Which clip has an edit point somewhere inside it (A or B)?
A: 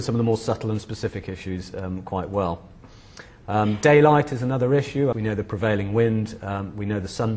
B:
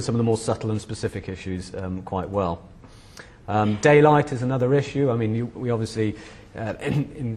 A